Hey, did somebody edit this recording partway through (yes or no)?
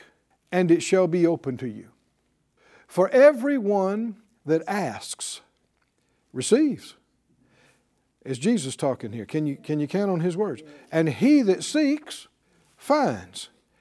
no